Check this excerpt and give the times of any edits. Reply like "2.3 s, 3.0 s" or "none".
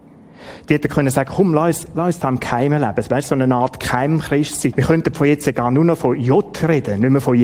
4.7 s